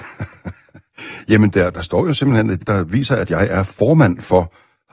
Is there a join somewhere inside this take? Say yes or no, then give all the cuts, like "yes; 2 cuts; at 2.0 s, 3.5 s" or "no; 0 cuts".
yes; 1 cut; at 2.6 s